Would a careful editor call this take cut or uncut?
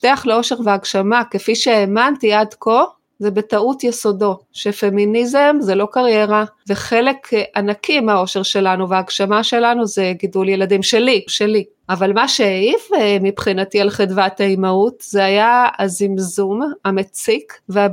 cut